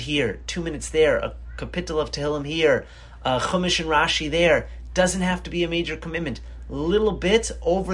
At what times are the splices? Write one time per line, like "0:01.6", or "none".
none

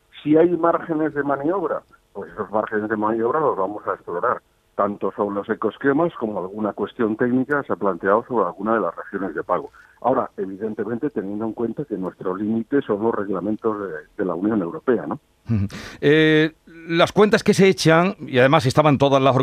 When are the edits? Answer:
0:09.9

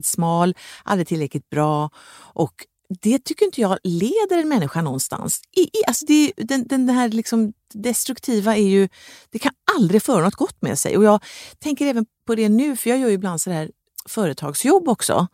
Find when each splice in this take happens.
none

